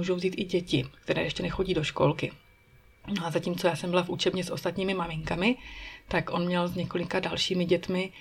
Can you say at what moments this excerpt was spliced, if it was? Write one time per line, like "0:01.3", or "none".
0:03.0